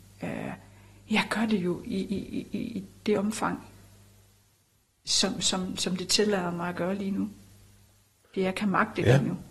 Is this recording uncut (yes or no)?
yes